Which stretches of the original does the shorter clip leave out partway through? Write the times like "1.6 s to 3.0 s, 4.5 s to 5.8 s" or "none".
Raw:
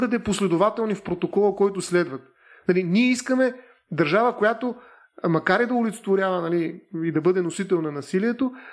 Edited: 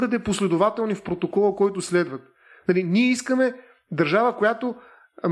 none